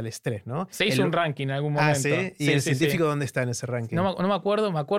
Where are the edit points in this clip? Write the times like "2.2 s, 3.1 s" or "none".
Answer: none